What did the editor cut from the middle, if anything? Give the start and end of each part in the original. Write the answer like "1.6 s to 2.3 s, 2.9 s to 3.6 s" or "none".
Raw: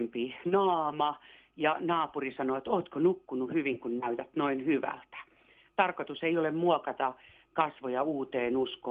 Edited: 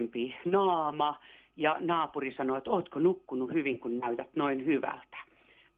none